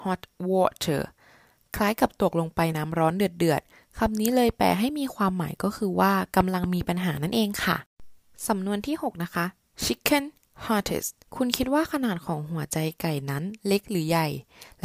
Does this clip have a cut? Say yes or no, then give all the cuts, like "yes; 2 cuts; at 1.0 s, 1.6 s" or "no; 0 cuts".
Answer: yes; 2 cuts; at 2.7 s, 11.2 s